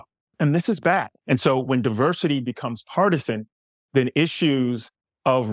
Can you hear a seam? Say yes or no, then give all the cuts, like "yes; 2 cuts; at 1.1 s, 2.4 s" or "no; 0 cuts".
yes; 1 cut; at 1.2 s